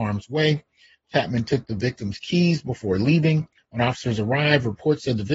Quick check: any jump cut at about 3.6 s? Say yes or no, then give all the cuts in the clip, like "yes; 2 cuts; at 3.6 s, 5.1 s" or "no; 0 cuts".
yes; 1 cut; at 3.6 s